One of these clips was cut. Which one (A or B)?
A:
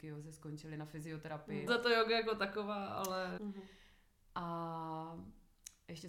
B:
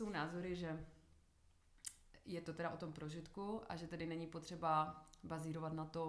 A